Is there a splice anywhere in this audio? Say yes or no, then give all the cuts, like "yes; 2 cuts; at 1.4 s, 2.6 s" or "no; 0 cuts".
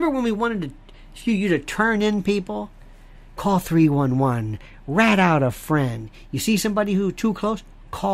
no; 0 cuts